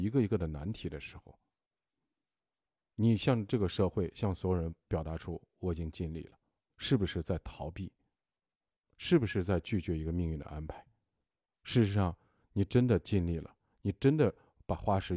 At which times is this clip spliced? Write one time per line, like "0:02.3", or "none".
0:06.7